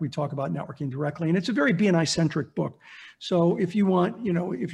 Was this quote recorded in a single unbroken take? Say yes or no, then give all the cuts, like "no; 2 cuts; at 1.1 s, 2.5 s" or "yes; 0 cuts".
yes; 0 cuts